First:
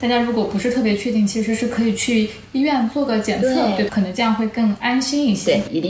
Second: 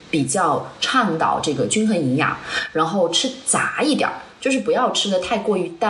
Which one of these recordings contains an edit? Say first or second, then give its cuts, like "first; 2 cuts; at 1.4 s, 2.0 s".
first; 1 cut; at 3.9 s